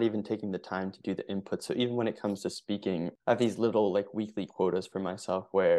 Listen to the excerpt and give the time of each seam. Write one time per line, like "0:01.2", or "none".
0:03.2